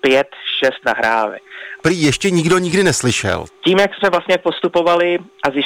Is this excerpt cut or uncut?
cut